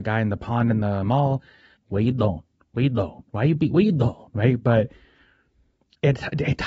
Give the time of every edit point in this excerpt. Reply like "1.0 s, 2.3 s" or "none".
1.8 s

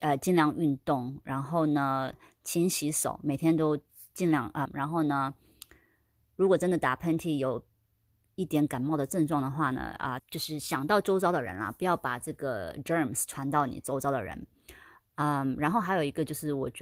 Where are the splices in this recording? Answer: 4.7 s, 10.2 s

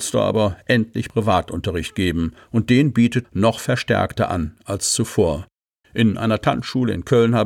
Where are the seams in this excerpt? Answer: 3.2 s, 5.8 s

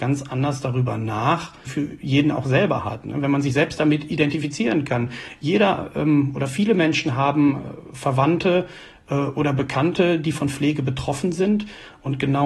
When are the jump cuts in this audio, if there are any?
1.7 s

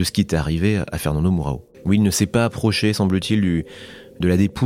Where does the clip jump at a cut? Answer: 1.7 s

